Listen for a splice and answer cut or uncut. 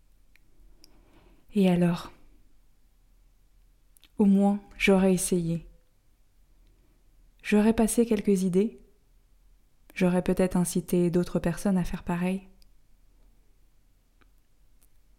uncut